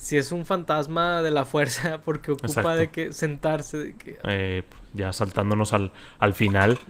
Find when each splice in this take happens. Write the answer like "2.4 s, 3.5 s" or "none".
4.2 s